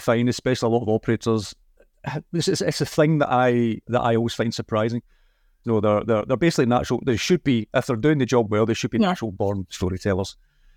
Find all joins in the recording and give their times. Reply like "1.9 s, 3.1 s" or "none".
5.6 s